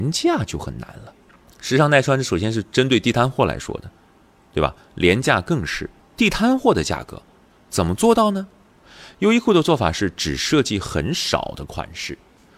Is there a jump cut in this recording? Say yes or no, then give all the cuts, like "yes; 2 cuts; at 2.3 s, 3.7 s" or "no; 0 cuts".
yes; 1 cut; at 6.0 s